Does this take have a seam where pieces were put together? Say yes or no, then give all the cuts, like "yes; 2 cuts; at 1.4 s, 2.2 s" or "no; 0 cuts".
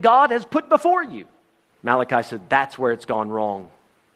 yes; 1 cut; at 1.7 s